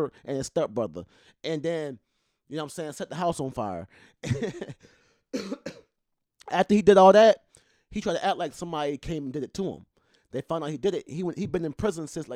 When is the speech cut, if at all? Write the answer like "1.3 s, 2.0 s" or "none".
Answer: none